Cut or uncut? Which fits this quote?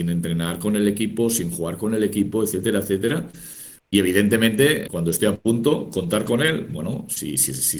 cut